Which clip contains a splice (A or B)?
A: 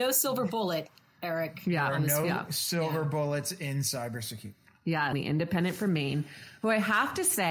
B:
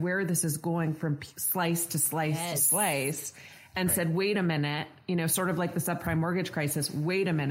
A